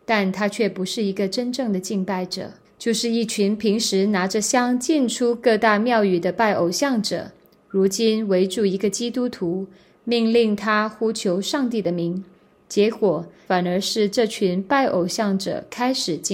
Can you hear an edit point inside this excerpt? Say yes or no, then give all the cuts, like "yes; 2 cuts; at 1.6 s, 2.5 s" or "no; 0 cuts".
yes; 2 cuts; at 2.6 s, 13.5 s